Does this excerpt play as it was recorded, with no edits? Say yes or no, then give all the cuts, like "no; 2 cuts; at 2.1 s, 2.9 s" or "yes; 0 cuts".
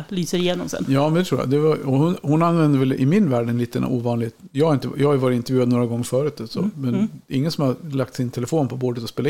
yes; 0 cuts